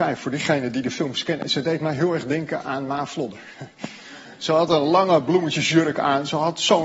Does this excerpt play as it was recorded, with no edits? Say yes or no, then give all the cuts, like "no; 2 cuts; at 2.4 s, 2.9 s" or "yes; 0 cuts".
yes; 0 cuts